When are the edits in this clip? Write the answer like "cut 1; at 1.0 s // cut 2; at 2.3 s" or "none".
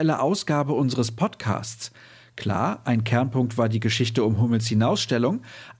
none